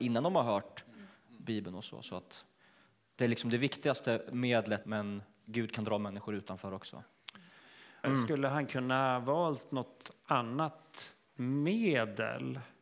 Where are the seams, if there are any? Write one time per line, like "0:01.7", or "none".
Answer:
0:04.8
0:08.0